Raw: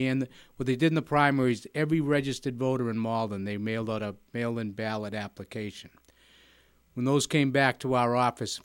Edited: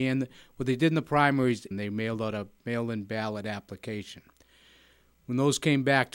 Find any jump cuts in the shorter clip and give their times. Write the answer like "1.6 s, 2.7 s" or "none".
1.7 s